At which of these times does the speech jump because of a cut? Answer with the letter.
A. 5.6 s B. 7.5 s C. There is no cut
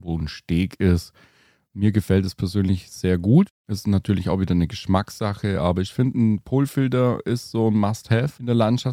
C